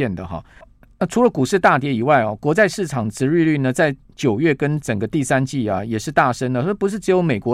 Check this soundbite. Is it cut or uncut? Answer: uncut